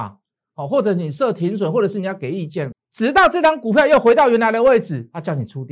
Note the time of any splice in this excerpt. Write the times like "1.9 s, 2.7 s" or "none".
2.7 s